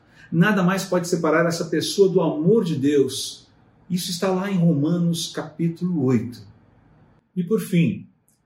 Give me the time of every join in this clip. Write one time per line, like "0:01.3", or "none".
none